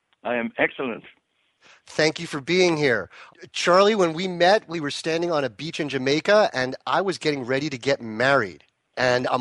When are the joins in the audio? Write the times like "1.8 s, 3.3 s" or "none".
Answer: none